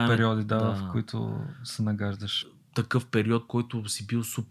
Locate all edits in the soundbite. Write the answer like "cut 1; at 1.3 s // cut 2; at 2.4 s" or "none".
cut 1; at 2.4 s // cut 2; at 3.5 s